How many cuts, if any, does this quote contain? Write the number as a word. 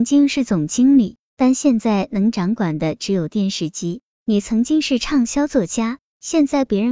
zero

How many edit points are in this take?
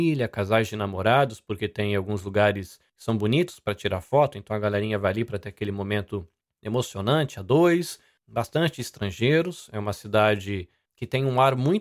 zero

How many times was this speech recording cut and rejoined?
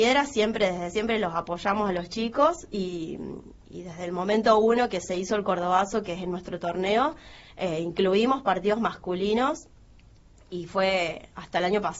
one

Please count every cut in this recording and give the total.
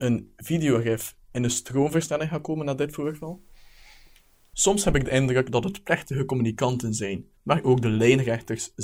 two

